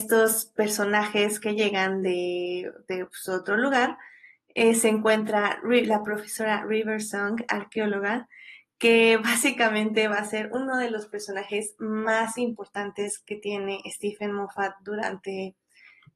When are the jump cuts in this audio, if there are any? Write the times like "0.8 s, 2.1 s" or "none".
none